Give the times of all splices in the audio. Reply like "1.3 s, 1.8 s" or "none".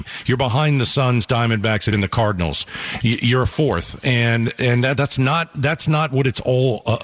1.9 s

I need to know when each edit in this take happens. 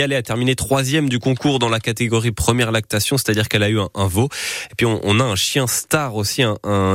none

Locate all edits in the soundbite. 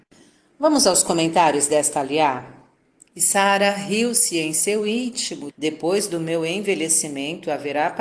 3.1 s, 5.5 s

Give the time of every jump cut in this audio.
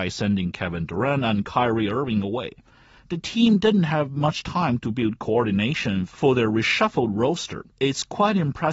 7.7 s

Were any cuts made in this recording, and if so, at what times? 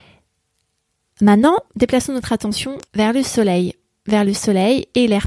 1.7 s, 2.8 s

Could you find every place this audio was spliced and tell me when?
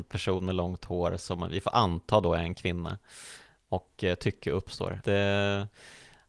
5.0 s

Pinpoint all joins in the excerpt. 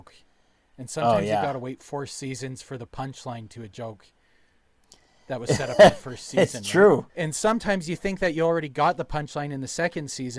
7.1 s

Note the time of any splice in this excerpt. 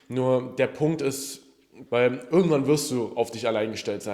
1.9 s

